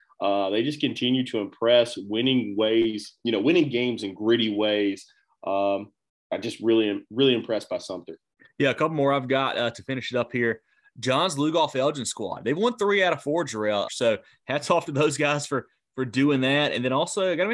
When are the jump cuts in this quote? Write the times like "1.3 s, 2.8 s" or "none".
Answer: 13.9 s